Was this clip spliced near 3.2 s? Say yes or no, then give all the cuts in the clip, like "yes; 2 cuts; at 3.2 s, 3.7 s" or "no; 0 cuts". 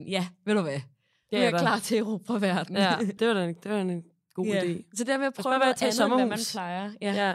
yes; 1 cut; at 3.2 s